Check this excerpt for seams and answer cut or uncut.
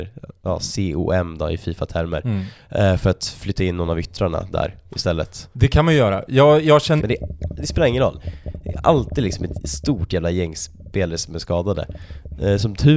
cut